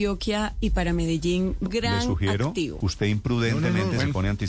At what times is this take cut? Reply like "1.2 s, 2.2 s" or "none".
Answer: 1.7 s, 2.8 s